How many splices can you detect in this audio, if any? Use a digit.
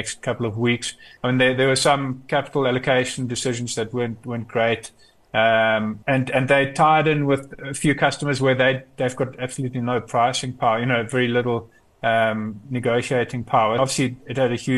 3